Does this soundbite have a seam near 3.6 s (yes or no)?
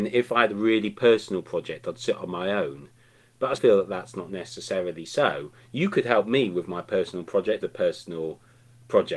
yes